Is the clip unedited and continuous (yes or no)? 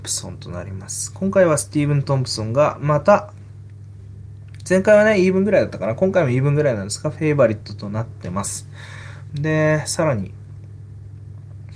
no